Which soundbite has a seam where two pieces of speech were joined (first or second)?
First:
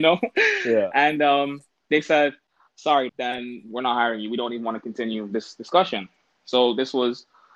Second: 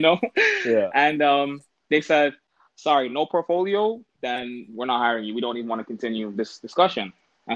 first